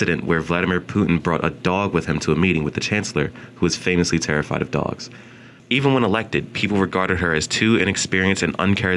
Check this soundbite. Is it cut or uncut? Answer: cut